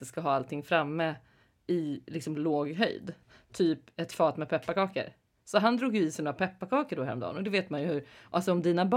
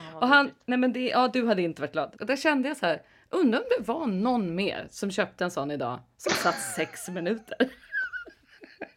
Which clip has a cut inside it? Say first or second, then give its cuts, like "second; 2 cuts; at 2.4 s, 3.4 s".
second; 1 cut; at 2.2 s